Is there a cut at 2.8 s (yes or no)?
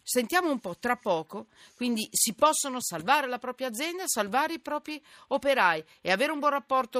yes